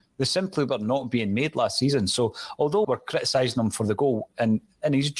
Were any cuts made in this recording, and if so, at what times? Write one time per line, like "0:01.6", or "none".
0:02.8